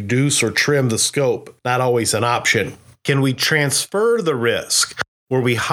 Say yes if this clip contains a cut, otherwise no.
no